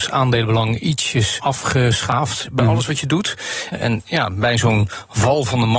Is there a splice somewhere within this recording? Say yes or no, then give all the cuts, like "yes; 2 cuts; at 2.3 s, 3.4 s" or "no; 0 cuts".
yes; 3 cuts; at 1.4 s, 2.4 s, 3.7 s